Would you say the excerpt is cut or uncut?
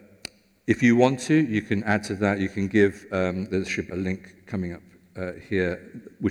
cut